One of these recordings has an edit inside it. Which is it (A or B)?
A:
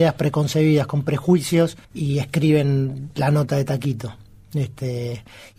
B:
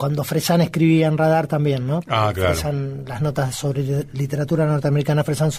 A